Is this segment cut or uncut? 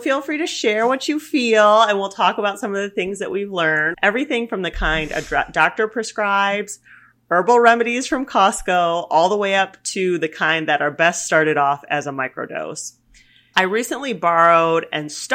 cut